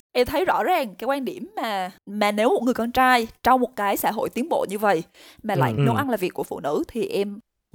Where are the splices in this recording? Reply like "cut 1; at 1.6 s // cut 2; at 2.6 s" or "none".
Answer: cut 1; at 2.0 s // cut 2; at 5.8 s